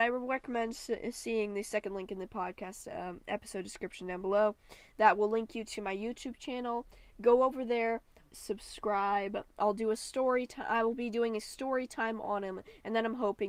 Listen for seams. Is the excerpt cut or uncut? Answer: cut